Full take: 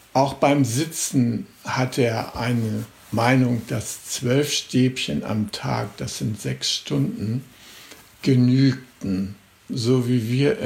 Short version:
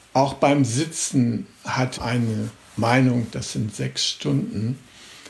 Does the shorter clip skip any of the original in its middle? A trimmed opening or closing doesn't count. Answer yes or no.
yes